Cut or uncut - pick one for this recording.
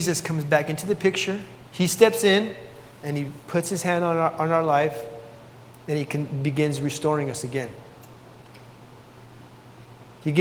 cut